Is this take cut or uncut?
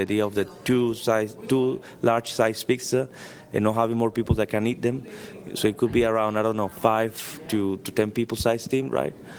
uncut